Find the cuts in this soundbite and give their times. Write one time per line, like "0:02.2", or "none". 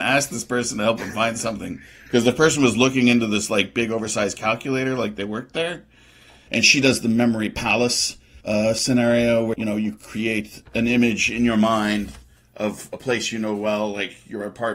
0:06.5
0:08.4
0:09.5